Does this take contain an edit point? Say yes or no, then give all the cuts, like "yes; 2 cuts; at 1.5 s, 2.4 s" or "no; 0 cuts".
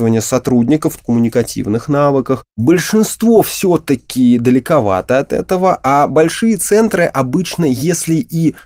yes; 1 cut; at 1.0 s